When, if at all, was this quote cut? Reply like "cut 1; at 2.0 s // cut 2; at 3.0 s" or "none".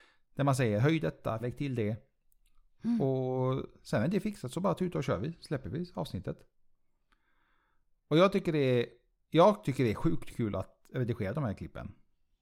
cut 1; at 1.4 s